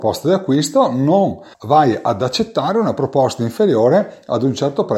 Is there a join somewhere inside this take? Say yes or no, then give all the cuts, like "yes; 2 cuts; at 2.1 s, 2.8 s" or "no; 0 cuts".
yes; 1 cut; at 1.5 s